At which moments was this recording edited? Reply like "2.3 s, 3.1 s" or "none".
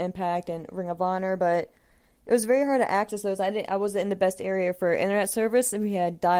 none